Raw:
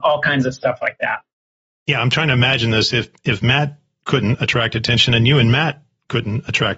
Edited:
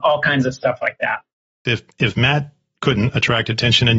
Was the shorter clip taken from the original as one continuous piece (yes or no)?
no